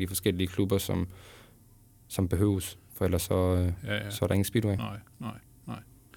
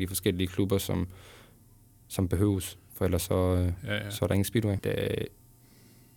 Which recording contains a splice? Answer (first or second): second